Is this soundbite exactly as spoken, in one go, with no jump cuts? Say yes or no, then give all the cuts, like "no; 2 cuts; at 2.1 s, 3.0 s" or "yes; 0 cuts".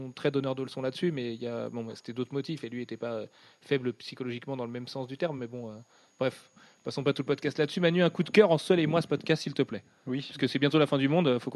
yes; 0 cuts